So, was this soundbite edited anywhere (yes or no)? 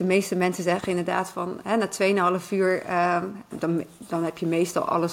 yes